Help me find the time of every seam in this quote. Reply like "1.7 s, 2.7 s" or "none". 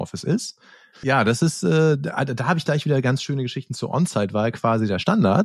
0.9 s